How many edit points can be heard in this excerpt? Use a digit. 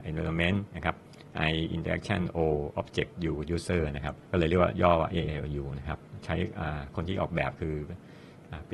1